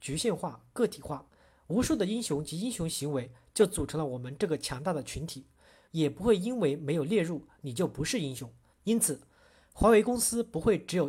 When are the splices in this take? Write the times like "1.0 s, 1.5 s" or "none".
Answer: 5.9 s, 8.7 s